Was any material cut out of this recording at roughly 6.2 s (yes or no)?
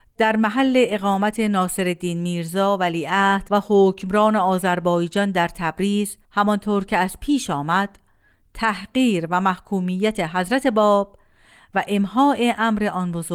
yes